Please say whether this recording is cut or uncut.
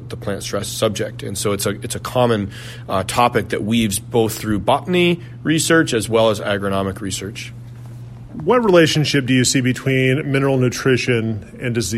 uncut